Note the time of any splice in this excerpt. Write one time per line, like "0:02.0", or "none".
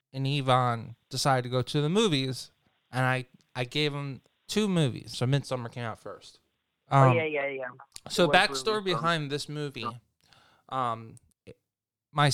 0:05.1
0:06.8